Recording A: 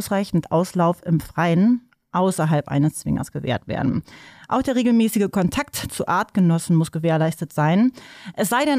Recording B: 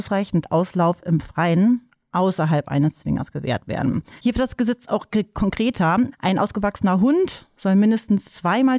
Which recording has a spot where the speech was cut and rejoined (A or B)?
B